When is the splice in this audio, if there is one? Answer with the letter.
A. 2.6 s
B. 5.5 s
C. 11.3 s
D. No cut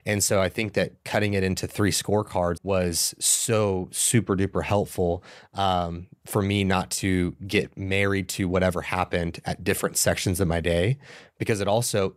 A